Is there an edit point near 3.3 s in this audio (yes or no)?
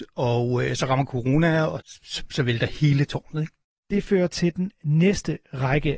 no